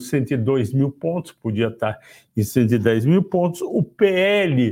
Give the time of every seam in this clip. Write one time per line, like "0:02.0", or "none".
none